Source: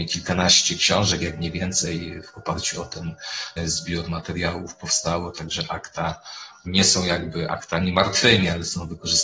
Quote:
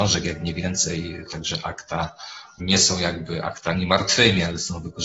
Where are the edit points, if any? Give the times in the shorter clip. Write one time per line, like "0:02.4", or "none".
0:01.3

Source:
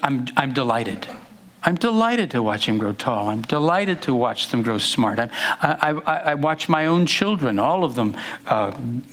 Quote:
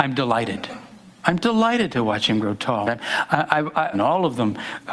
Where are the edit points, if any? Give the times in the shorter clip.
0:02.8
0:03.9

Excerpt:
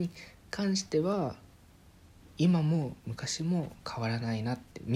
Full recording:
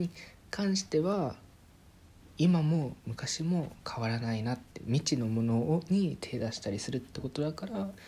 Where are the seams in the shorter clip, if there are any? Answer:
none

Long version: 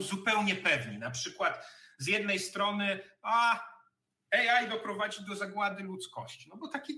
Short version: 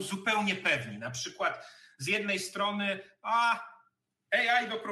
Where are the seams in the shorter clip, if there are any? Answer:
none

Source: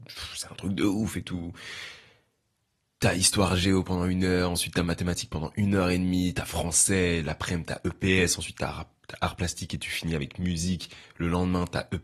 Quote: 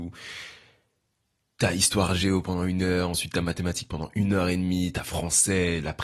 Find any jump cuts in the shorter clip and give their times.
none

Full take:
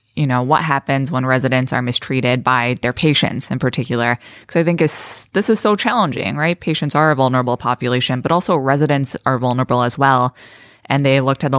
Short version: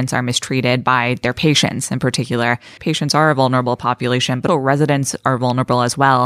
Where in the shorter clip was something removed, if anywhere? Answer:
0:02.8
0:04.5

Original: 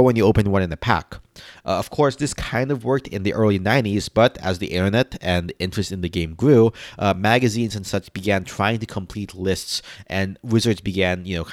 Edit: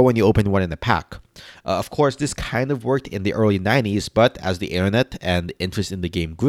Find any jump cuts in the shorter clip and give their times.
none

